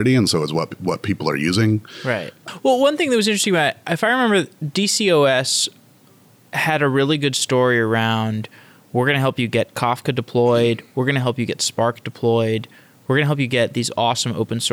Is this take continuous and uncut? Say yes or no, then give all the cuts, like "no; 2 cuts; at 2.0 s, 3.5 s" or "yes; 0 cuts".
yes; 0 cuts